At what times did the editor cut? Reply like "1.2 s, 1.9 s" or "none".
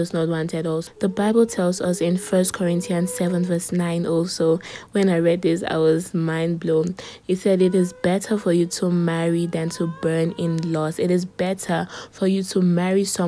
none